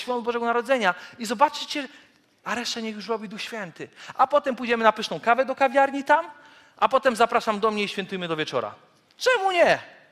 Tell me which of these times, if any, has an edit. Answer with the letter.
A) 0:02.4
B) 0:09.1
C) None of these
A